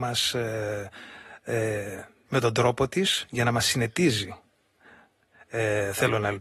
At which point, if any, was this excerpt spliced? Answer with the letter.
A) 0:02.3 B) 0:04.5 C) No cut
A